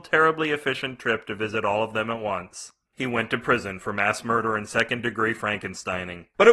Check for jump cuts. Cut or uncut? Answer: uncut